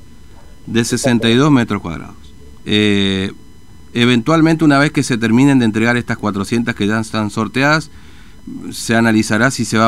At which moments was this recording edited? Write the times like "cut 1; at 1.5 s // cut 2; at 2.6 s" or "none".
cut 1; at 2.6 s